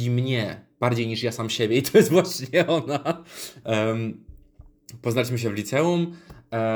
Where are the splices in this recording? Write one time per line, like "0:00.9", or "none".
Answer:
0:03.6